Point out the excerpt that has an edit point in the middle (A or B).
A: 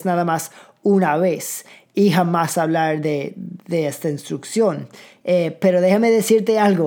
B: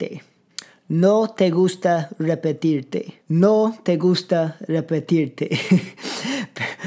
B